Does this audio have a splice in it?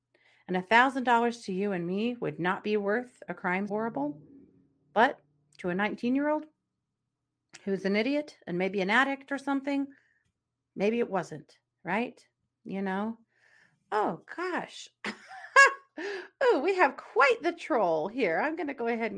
yes; 1 cut; at 3.7 s

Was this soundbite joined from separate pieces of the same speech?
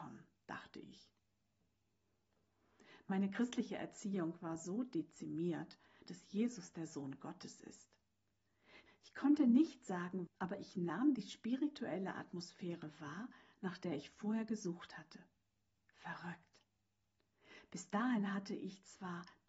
yes; 3 cuts; at 6.1 s, 8.9 s, 10.3 s

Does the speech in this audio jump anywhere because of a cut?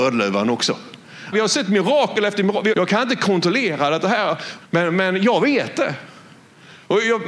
yes; 3 cuts; at 1.3 s, 2.7 s, 4.6 s

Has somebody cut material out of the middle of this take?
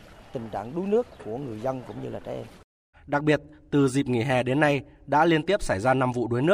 yes; 1 cut; at 2.9 s

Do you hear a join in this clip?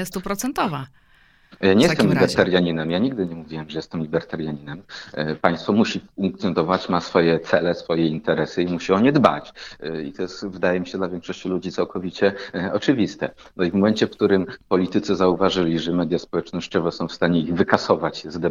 no; 0 cuts

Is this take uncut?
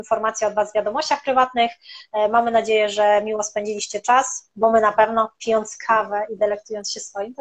yes; 0 cuts

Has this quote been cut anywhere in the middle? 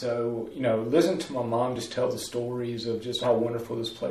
no; 0 cuts

